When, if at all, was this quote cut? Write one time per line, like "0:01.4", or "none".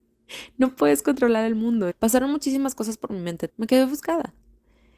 0:01.9
0:03.5